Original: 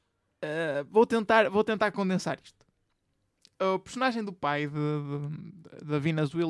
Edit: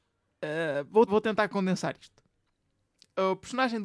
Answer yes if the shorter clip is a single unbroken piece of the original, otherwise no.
no